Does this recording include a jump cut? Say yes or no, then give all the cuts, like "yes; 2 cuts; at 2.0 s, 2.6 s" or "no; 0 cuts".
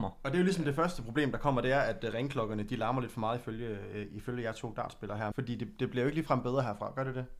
yes; 1 cut; at 5.3 s